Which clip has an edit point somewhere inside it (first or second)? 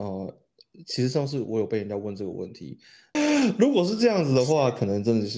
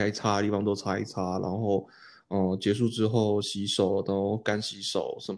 first